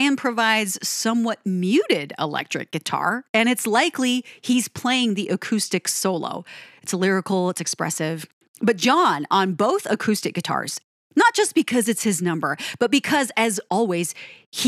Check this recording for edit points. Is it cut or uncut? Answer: cut